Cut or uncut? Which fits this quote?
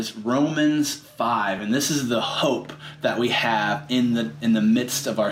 uncut